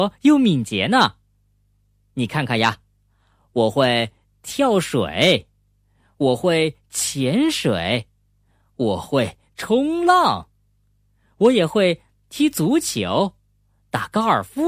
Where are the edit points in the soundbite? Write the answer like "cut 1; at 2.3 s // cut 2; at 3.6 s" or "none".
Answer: none